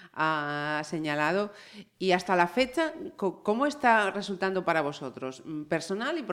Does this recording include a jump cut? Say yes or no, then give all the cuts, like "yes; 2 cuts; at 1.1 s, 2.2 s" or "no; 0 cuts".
no; 0 cuts